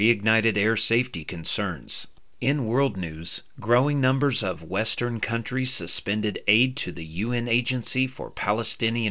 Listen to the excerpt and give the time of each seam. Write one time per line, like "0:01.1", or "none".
none